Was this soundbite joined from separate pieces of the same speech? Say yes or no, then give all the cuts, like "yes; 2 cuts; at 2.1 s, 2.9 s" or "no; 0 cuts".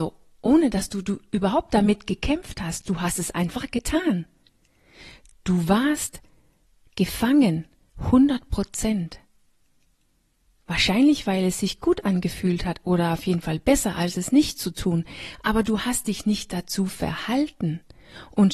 no; 0 cuts